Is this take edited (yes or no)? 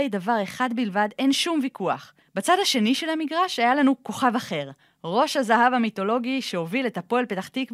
yes